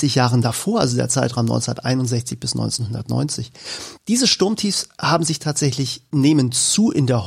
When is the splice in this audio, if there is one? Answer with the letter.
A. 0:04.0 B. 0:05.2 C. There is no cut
A